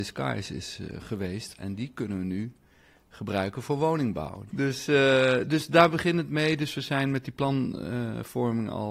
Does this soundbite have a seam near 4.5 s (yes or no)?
yes